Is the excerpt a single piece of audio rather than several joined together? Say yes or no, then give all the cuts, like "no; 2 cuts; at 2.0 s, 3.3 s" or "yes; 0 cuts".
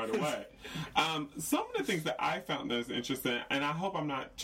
yes; 0 cuts